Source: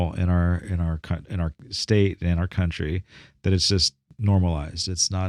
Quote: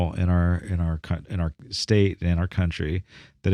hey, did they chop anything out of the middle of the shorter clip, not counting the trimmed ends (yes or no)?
no